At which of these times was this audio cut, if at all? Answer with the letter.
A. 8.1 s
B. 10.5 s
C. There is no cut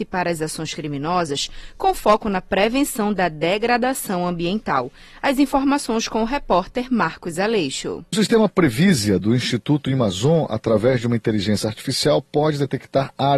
A